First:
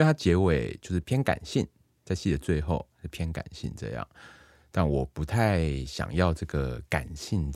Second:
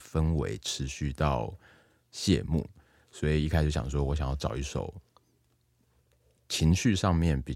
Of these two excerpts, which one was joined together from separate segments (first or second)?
first